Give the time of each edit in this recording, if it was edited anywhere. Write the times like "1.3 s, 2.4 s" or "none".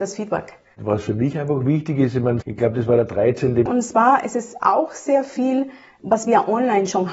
2.4 s, 3.7 s